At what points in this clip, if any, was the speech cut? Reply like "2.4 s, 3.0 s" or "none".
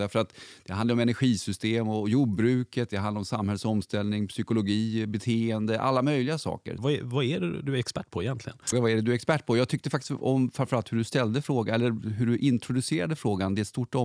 6.8 s, 8.7 s